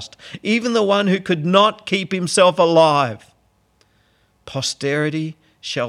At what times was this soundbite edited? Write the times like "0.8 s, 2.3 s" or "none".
none